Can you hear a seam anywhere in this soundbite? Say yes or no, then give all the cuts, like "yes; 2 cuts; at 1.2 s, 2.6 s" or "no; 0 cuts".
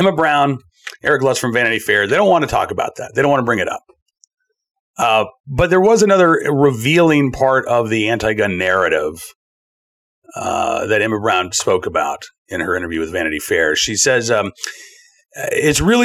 yes; 1 cut; at 6.4 s